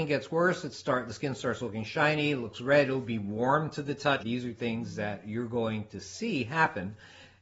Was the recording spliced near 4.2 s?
yes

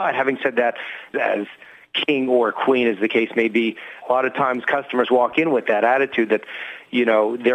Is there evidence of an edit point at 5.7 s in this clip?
no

